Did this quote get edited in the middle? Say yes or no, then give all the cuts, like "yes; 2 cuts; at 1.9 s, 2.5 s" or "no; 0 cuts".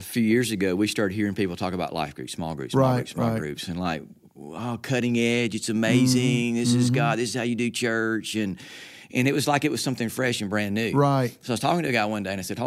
no; 0 cuts